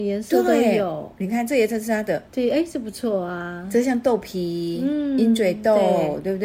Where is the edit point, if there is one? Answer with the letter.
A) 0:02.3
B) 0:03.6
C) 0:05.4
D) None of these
A